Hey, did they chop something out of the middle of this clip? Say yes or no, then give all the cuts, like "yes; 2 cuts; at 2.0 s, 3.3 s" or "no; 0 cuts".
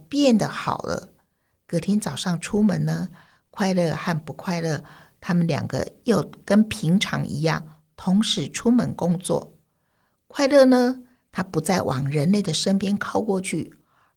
no; 0 cuts